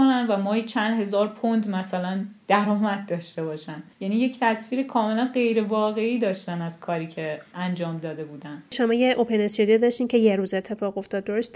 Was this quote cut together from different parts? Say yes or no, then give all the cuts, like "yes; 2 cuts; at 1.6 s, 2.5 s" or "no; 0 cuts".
yes; 1 cut; at 3.9 s